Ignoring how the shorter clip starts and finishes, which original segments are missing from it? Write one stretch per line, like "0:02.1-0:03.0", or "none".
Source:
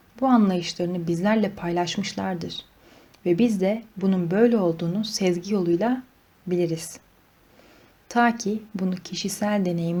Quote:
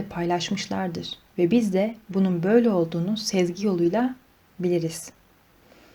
0:02.7-0:03.1